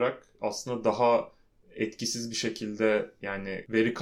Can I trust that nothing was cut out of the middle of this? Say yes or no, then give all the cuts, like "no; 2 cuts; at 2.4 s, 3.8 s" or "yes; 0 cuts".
yes; 0 cuts